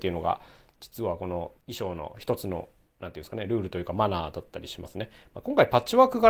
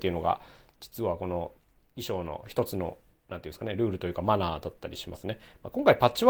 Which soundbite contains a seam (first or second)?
first